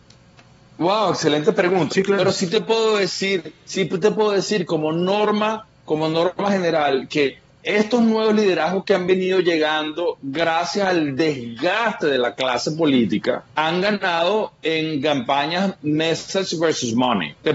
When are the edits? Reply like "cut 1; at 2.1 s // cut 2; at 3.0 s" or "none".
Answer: cut 1; at 1.9 s